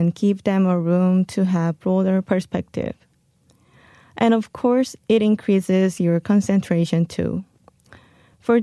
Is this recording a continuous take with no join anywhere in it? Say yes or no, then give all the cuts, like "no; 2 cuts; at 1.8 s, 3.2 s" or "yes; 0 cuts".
yes; 0 cuts